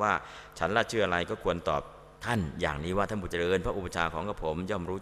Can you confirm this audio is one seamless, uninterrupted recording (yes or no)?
no